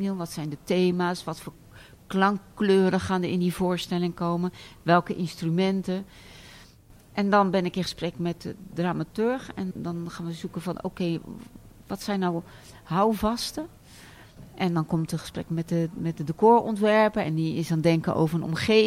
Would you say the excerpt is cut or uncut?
cut